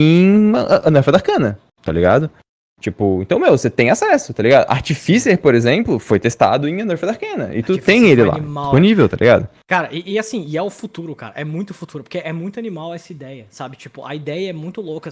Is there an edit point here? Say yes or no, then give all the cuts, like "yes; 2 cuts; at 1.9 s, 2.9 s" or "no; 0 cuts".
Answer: no; 0 cuts